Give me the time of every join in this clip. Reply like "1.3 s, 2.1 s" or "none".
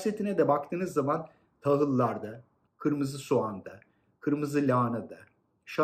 2.7 s